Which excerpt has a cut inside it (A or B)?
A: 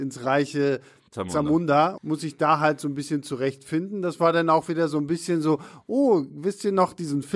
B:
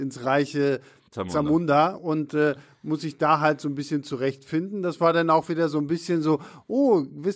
A